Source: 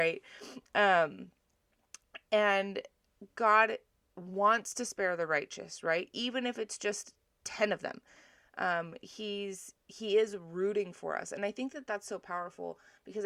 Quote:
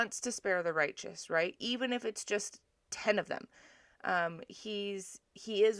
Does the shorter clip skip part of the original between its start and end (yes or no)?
no